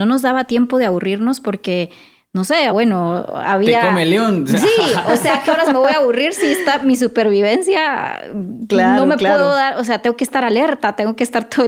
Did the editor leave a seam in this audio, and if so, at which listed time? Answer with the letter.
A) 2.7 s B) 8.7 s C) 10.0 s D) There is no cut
A